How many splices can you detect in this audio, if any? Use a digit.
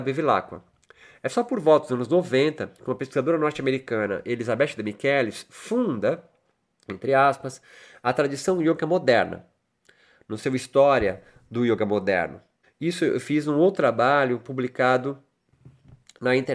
1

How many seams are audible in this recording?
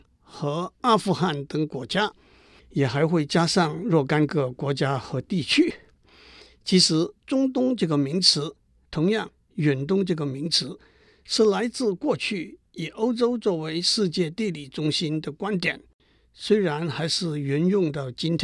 1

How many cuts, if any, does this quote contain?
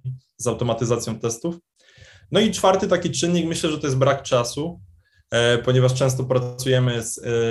0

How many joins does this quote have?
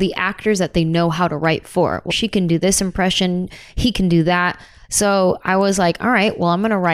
2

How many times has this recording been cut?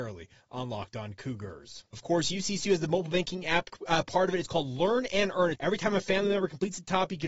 2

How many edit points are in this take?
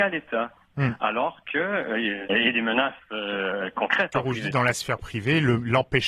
2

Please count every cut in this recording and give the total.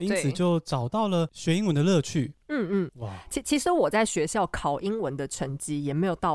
1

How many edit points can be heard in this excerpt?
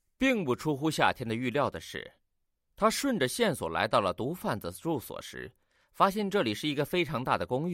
0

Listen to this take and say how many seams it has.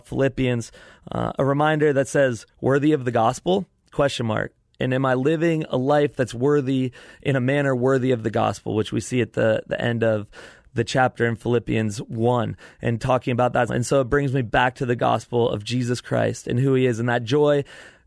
1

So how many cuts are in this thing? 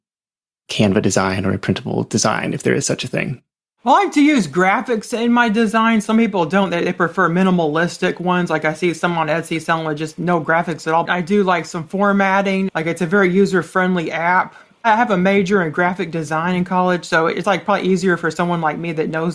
2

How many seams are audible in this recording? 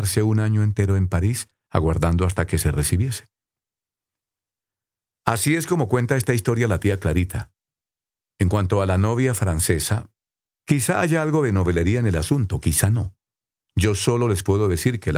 2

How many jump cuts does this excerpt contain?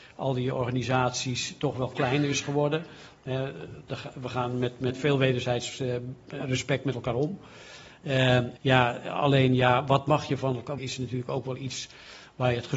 2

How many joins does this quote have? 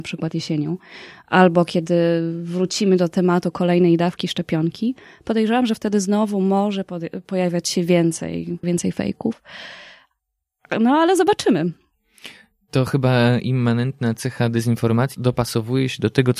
2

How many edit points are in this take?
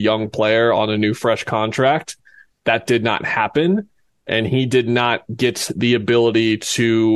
0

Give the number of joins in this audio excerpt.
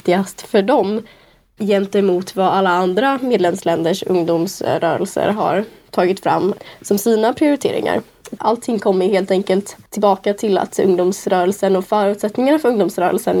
2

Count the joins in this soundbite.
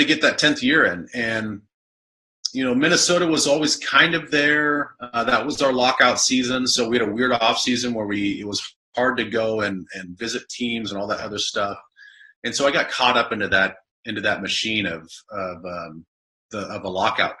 0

